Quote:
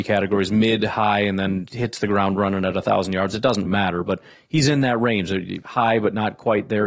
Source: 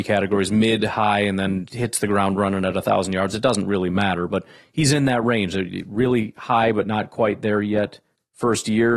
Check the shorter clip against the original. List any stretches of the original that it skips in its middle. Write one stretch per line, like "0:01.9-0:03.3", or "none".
0:03.6-0:03.9
0:05.8-0:06.3